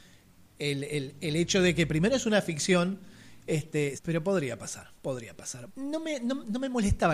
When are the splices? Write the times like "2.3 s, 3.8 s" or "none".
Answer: 3.9 s, 5.7 s